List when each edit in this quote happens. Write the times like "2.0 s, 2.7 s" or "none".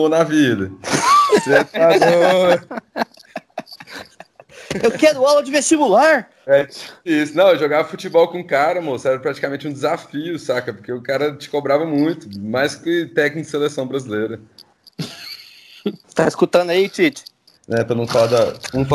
17.5 s